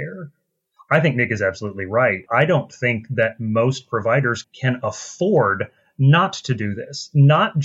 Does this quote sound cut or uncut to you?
cut